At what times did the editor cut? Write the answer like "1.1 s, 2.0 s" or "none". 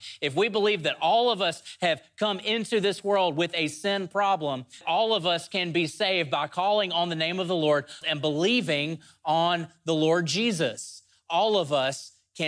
4.8 s, 8.0 s